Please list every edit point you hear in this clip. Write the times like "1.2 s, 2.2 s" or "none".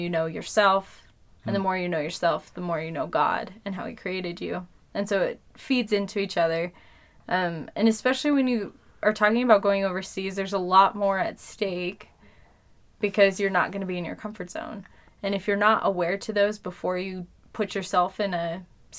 15.1 s